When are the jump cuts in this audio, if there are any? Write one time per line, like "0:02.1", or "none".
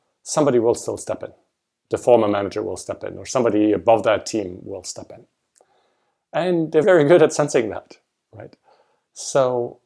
0:06.8